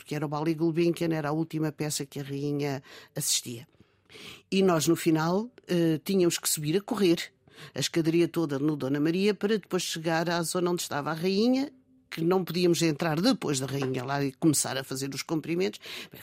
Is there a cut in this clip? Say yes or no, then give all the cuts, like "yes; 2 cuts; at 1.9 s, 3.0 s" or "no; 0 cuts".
no; 0 cuts